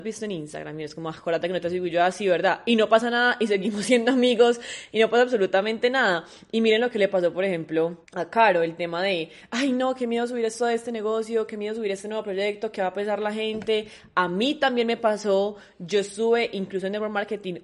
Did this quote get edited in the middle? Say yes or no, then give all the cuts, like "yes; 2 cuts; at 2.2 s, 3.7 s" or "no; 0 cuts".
yes; 1 cut; at 8.0 s